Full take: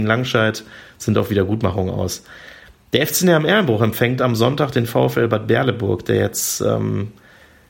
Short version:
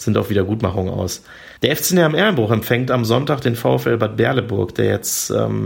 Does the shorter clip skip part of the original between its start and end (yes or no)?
yes